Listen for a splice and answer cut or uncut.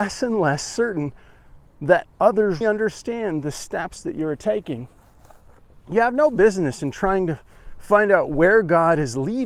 cut